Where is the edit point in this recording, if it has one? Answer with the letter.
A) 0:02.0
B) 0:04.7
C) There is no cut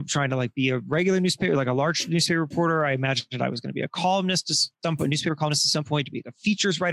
B